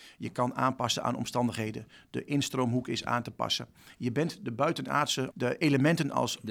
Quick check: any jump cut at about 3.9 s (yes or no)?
no